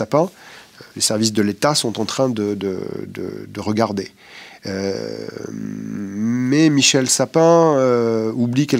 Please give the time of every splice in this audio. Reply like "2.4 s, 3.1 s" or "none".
0.9 s